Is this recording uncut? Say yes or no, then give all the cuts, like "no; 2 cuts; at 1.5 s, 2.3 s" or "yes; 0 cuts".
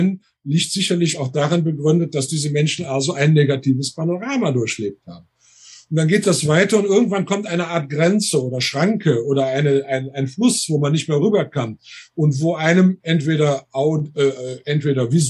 yes; 0 cuts